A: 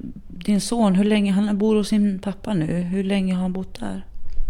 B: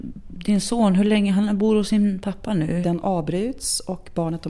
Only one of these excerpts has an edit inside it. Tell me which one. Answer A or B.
B